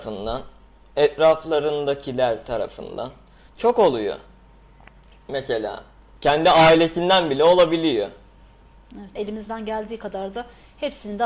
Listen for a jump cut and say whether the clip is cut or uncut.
cut